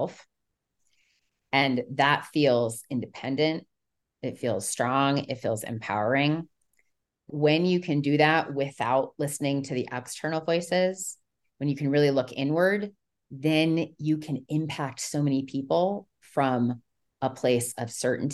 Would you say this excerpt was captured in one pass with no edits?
no; 1 cut; at 7.3 s

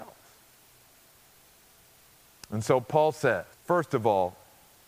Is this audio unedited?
no; 1 cut; at 3.5 s

